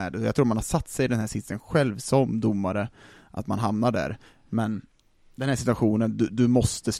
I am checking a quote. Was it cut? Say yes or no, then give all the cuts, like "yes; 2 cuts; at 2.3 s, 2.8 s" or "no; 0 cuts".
no; 0 cuts